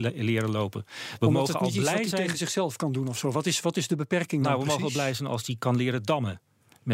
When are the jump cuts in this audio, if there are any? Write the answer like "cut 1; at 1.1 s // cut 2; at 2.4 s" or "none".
none